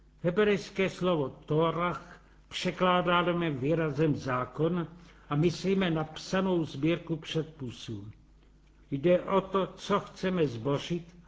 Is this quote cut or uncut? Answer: cut